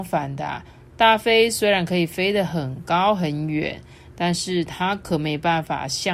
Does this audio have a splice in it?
no; 0 cuts

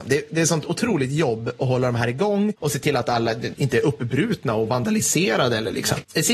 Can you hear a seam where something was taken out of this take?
yes; 1 cut; at 3.5 s

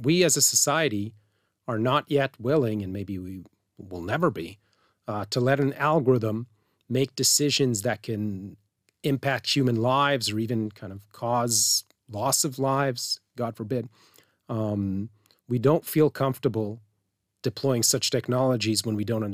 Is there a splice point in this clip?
no; 0 cuts

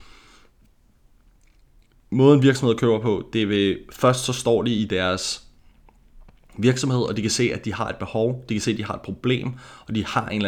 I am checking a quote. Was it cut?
no; 0 cuts

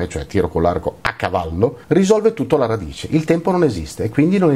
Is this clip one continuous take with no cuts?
no; 1 cut; at 1.8 s

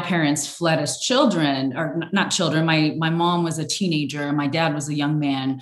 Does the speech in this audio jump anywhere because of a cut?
no; 0 cuts

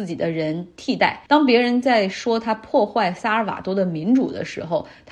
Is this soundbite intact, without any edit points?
no; 1 cut; at 1.3 s

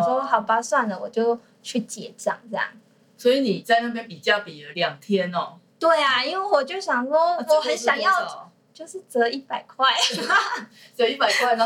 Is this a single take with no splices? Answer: yes; 0 cuts

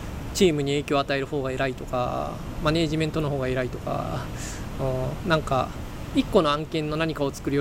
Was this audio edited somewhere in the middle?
no; 0 cuts

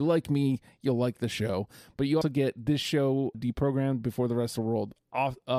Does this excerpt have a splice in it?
yes; 2 cuts; at 2.2 s, 3.3 s

